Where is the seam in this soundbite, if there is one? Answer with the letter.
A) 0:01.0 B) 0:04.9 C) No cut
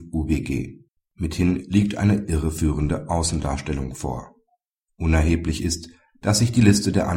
A